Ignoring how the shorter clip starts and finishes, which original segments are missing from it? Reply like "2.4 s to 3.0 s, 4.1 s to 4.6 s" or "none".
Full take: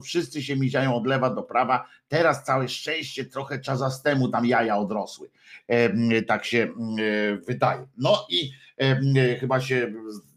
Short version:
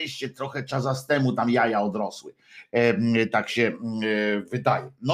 none